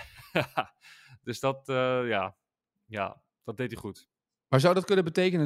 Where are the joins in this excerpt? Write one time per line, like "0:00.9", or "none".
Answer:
none